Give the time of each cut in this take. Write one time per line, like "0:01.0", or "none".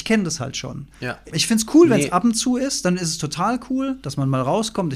0:01.3